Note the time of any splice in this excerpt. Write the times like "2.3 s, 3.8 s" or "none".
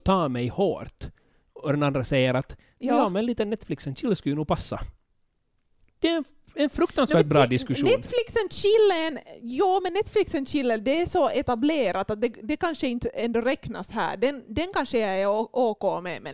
none

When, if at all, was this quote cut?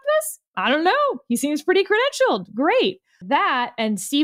3.2 s

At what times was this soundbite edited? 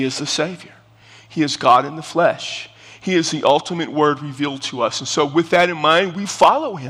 none

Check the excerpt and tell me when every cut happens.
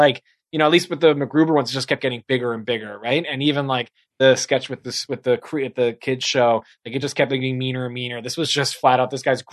none

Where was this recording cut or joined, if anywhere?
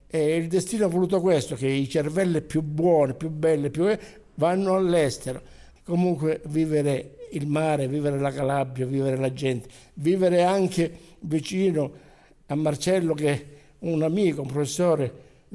5.8 s

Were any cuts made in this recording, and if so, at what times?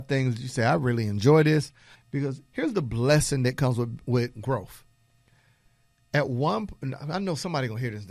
1.9 s

